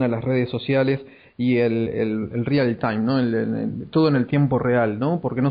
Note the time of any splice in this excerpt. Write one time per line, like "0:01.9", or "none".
0:01.9